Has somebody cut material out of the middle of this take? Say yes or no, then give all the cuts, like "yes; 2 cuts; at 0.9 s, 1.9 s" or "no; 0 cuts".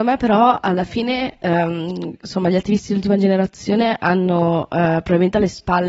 no; 0 cuts